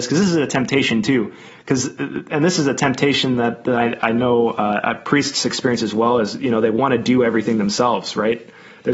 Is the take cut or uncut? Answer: uncut